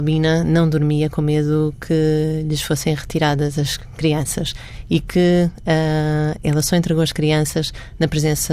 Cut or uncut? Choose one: uncut